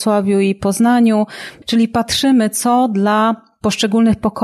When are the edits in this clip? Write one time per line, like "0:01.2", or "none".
0:01.6